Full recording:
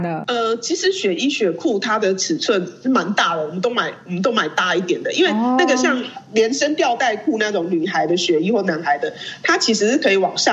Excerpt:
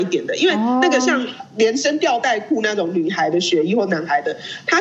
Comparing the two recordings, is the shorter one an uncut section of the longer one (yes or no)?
yes